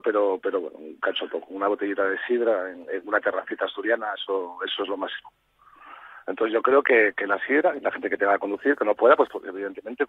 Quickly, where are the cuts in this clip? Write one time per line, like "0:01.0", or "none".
none

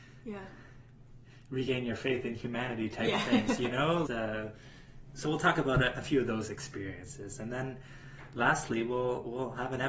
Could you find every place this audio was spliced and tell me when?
0:04.0

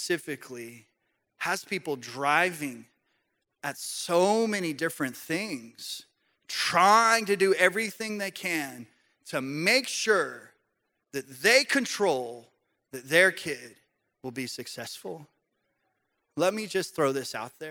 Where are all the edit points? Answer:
none

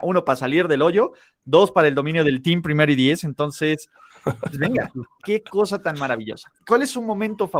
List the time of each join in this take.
0:05.2
0:06.6

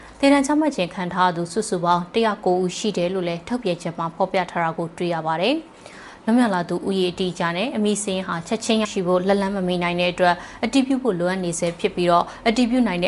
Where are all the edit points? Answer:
0:08.8

